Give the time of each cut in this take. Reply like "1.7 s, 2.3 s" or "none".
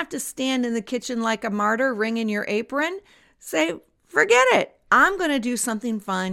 none